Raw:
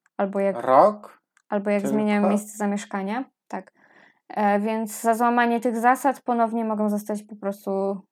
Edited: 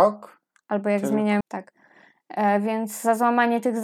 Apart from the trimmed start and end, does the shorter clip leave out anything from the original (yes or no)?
yes